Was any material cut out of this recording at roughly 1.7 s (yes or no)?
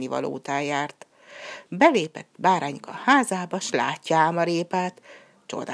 yes